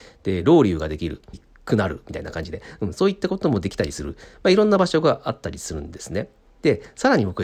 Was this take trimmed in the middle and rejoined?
yes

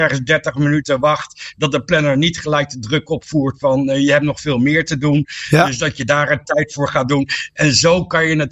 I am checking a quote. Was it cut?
no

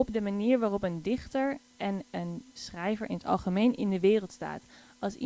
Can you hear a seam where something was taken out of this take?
yes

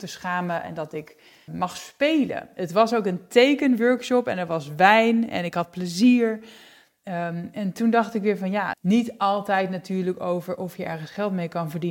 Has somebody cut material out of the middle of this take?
yes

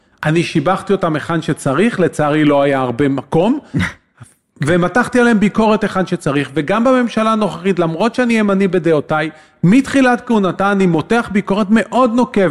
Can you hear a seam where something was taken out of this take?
no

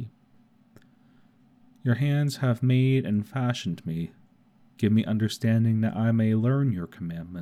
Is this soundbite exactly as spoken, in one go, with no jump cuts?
yes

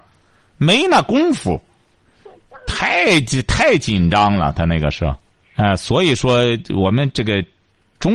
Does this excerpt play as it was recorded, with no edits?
no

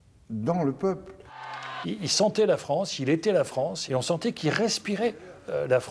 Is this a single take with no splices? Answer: no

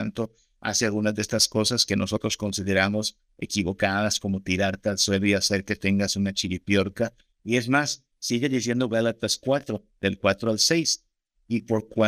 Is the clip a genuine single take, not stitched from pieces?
no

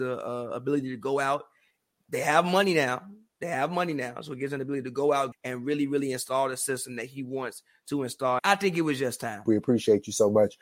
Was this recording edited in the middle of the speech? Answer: yes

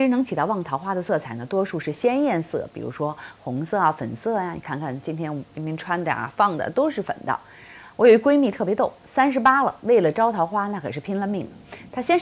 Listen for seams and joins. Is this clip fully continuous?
yes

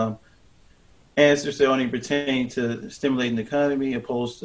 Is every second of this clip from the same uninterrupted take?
yes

